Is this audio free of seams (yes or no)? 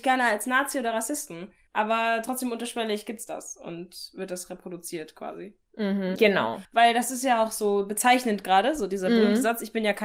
no